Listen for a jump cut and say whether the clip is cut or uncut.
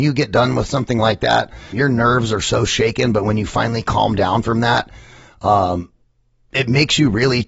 cut